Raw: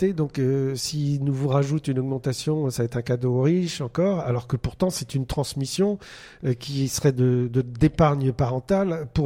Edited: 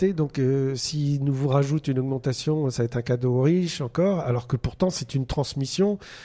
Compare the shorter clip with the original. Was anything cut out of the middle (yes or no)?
no